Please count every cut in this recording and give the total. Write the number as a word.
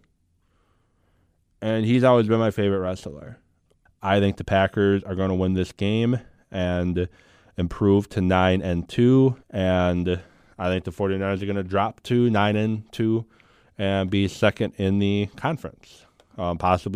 two